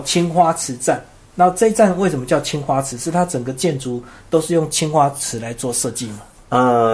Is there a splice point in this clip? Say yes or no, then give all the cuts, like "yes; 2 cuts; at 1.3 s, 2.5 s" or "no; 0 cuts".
no; 0 cuts